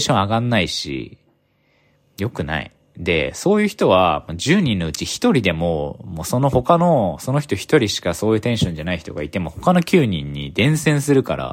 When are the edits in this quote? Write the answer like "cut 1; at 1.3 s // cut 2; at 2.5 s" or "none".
none